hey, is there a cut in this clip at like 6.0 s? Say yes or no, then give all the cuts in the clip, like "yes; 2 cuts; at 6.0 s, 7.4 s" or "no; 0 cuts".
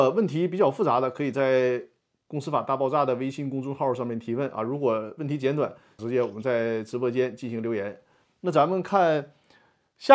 yes; 1 cut; at 6.0 s